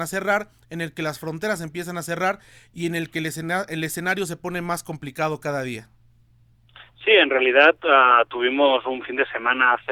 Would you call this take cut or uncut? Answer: uncut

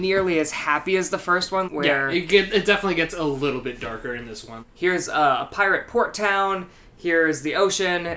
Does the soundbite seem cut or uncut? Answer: cut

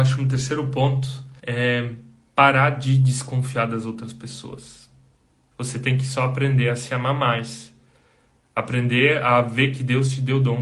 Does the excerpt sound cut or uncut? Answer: cut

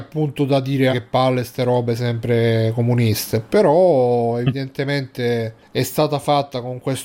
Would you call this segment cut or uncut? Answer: cut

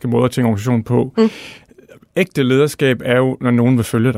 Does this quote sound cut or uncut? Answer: uncut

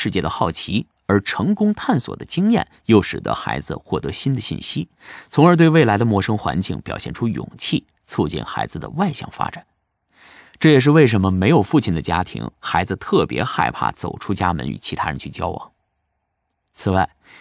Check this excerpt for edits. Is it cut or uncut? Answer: uncut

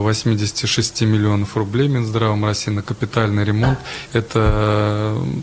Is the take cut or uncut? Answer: cut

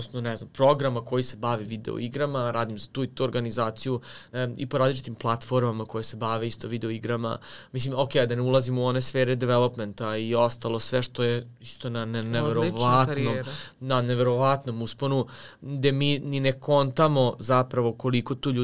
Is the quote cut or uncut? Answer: cut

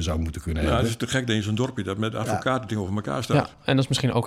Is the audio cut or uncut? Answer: uncut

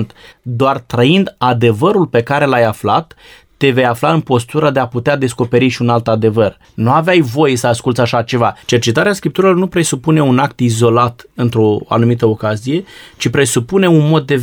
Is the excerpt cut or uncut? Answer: cut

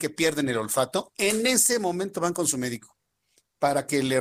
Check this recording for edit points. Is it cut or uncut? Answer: uncut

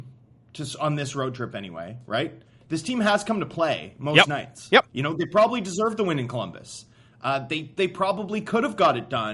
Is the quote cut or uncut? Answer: uncut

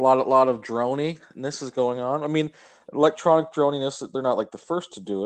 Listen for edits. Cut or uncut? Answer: uncut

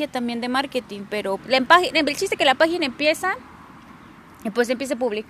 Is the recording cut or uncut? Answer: cut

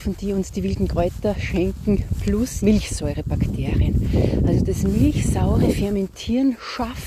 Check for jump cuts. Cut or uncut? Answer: cut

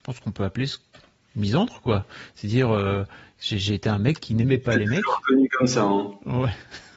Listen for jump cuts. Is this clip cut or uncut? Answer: uncut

